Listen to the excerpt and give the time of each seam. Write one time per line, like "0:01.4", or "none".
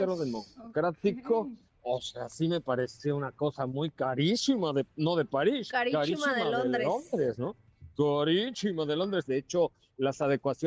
0:01.7
0:09.2